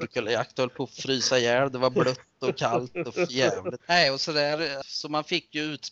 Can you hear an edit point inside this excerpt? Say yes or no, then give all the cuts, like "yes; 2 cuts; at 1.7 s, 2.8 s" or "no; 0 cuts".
yes; 2 cuts; at 3.8 s, 4.8 s